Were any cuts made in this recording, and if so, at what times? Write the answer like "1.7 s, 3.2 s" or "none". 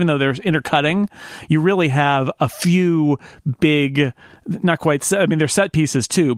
none